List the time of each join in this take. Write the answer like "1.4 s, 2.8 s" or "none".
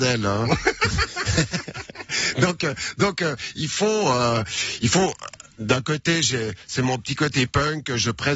none